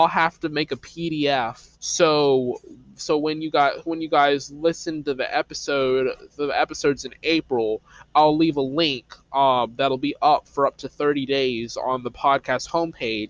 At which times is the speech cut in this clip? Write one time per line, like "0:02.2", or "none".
0:01.7